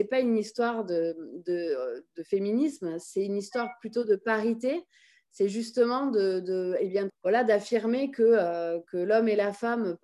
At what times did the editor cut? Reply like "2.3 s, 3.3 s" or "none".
7.1 s, 8.8 s